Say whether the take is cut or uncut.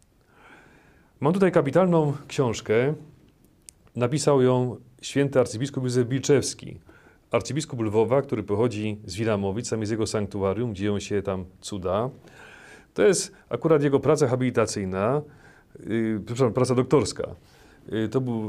uncut